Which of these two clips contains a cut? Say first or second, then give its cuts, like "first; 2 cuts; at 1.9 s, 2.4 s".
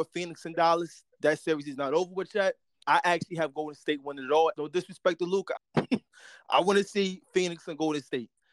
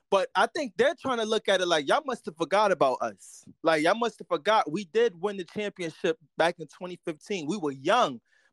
first; 3 cuts; at 2.8 s, 4.5 s, 5.6 s